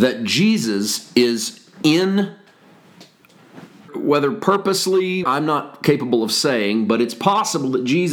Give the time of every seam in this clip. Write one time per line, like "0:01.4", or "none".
0:03.9
0:05.2